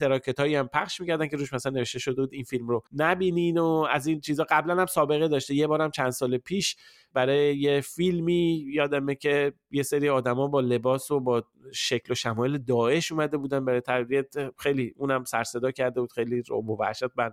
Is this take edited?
yes; 1 cut; at 2.9 s

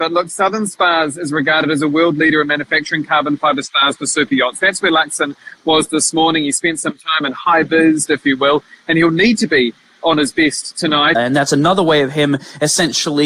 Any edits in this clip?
yes; 2 cuts; at 8.1 s, 11.1 s

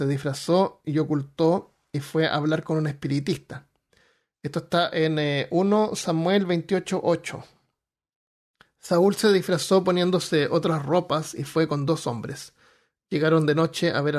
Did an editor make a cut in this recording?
no; 0 cuts

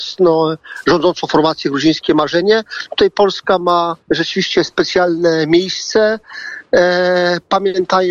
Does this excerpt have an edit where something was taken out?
yes; 1 cut; at 4.0 s

